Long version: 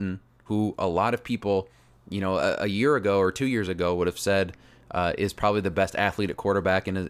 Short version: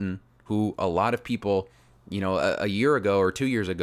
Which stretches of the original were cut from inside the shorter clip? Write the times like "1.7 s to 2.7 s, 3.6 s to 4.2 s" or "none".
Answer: none